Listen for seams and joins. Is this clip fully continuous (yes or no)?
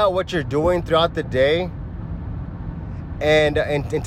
yes